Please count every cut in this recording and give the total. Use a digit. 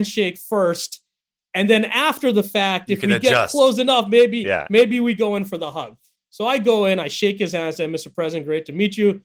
0